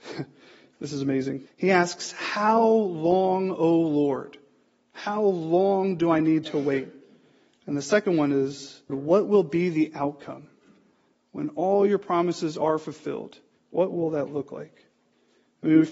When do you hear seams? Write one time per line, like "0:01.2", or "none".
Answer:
0:01.5
0:08.9
0:13.6

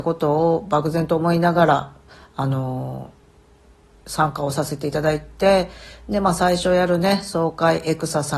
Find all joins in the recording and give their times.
none

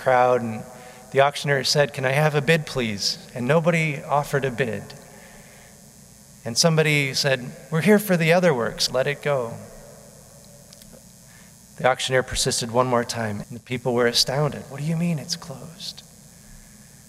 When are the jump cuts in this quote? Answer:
0:08.9
0:13.4

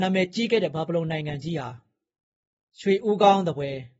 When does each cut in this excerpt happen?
none

